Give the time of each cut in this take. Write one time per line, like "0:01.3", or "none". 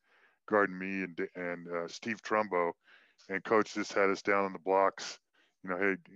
none